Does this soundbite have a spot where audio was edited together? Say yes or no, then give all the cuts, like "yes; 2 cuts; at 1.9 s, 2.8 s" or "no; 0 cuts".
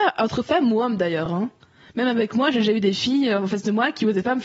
no; 0 cuts